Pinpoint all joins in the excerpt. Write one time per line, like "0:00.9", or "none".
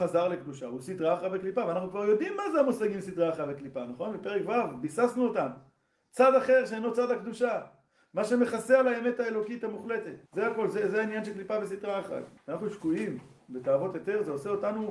0:10.3
0:12.4